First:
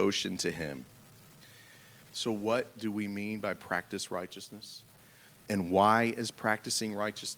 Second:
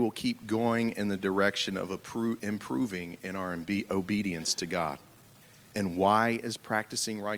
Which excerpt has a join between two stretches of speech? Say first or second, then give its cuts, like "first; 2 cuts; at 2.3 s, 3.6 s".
first; 2 cuts; at 2.0 s, 5.3 s